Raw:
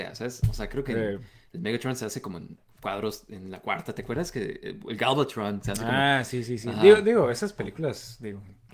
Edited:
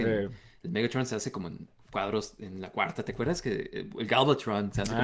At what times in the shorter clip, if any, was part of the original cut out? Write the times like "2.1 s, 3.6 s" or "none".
none